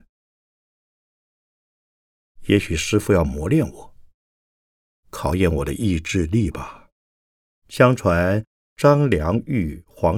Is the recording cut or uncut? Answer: cut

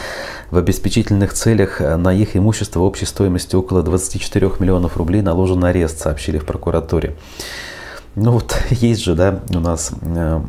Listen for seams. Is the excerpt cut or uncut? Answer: uncut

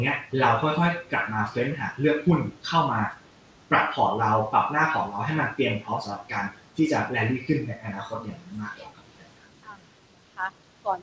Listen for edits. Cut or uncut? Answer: uncut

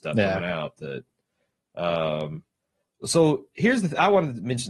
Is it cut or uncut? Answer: uncut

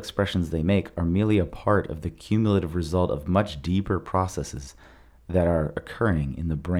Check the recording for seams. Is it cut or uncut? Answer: uncut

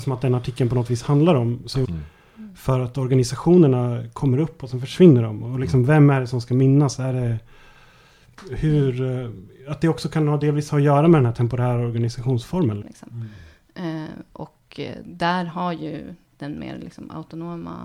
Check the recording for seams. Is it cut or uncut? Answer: cut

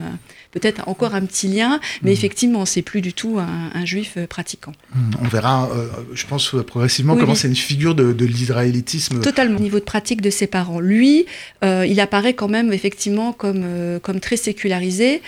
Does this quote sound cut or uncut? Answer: cut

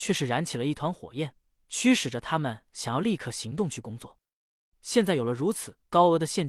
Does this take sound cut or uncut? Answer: cut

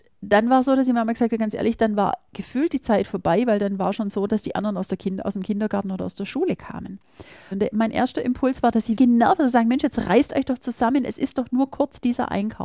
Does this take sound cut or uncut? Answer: cut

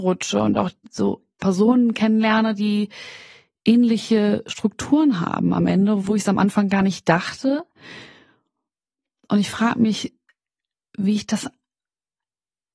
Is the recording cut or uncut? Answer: uncut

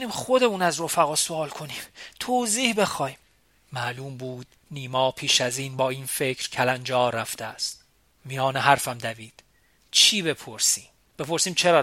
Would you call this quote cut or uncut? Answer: uncut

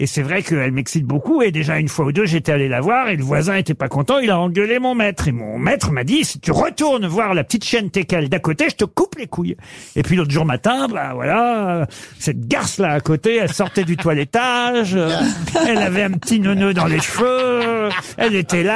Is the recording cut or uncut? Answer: uncut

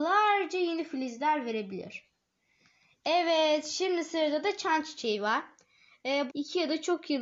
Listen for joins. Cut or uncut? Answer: cut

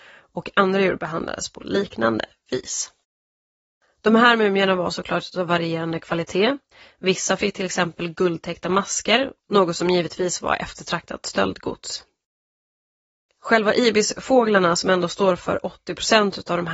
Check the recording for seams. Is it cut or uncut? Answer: uncut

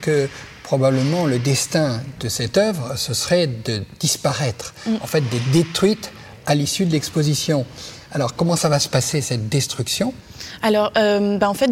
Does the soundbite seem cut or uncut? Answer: uncut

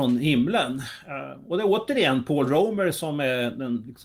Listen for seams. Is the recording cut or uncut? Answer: uncut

